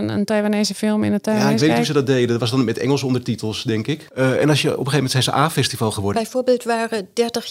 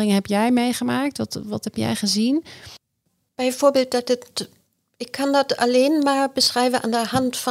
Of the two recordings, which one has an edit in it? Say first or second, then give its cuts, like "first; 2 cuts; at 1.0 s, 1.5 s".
first; 2 cuts; at 4.1 s, 6.1 s